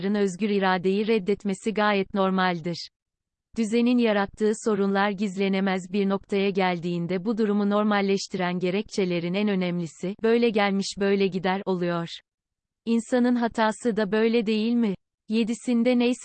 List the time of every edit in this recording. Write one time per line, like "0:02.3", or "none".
none